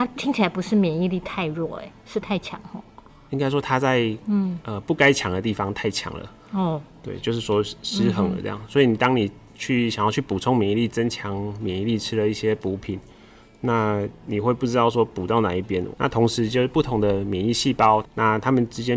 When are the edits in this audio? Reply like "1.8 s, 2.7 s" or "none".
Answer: 15.9 s, 18.0 s